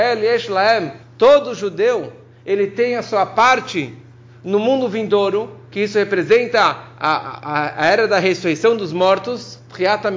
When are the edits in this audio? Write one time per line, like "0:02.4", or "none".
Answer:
0:01.0

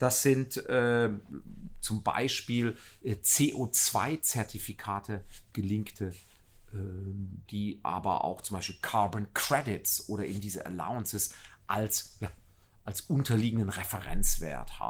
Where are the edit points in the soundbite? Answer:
0:07.5

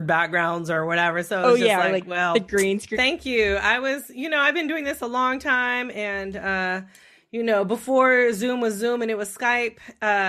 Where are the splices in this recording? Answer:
0:02.9

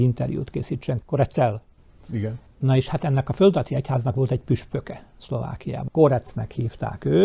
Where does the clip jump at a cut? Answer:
0:02.5
0:05.9

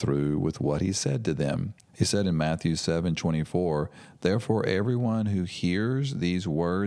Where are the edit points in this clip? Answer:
0:01.9

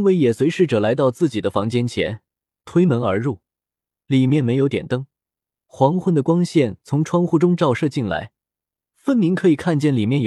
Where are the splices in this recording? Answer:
none

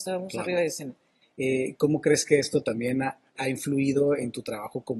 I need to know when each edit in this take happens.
0:01.2
0:03.4

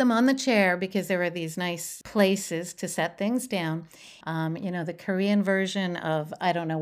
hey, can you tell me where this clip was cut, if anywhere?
0:02.0
0:04.2

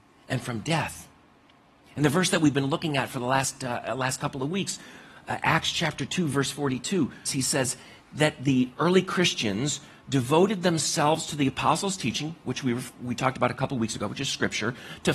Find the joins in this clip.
0:07.2

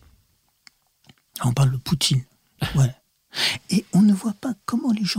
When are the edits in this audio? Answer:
0:02.6

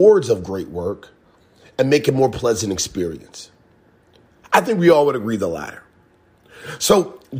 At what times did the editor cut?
none

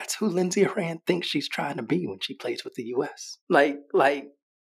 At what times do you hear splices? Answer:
0:03.4

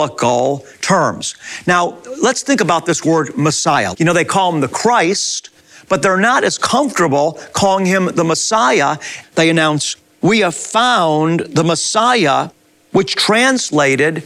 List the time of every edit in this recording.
0:03.9
0:09.2

